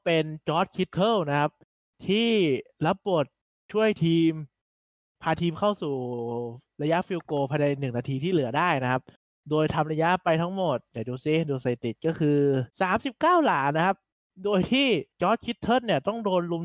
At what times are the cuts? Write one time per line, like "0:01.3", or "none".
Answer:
0:12.7
0:15.1